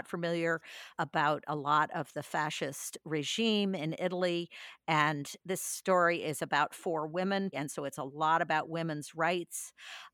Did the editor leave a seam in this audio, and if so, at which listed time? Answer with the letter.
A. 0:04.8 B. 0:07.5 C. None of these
B